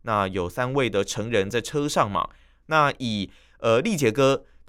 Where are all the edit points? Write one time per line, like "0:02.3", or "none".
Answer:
0:02.6